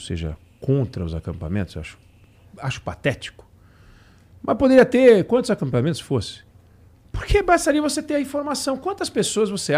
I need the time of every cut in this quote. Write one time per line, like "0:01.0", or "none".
none

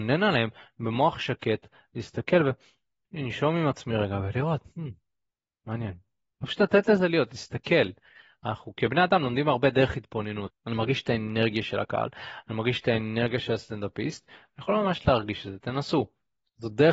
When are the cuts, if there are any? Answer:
0:10.5

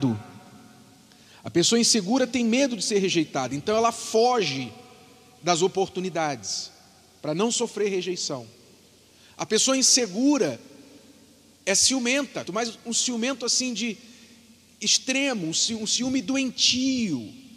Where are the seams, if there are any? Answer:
0:12.4

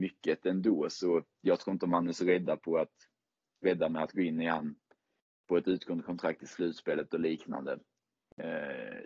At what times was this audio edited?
none

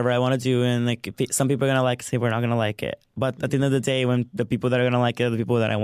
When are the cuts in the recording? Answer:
none

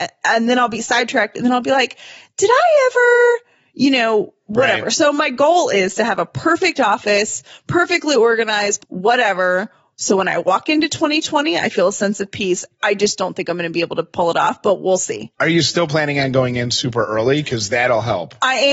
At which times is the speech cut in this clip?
0:08.8

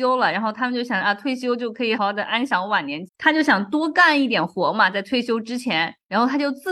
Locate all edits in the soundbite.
0:02.0
0:03.1

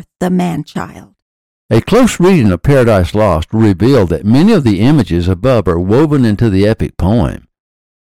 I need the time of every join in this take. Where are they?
0:01.6

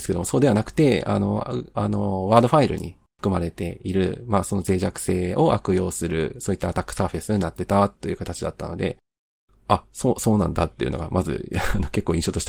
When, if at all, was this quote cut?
0:01.7

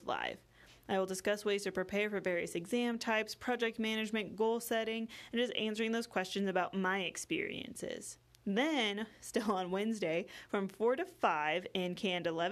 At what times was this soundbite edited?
none

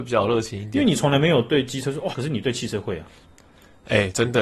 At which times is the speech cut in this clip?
0:02.1

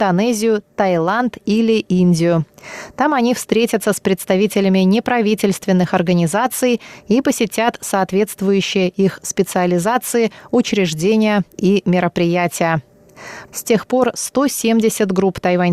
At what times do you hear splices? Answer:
0:13.5

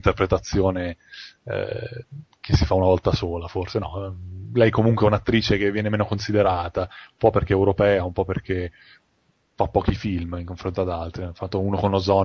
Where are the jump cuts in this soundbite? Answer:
none

